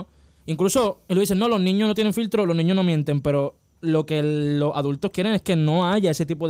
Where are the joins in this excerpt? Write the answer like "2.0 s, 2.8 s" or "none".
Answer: none